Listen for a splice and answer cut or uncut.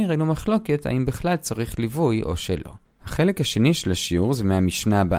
uncut